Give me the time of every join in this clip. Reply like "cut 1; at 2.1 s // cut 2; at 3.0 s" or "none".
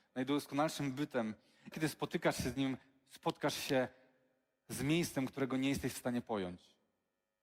cut 1; at 1.7 s